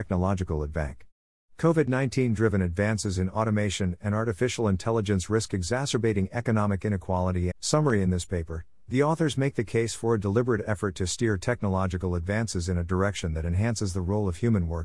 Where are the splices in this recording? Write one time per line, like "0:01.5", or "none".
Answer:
0:07.5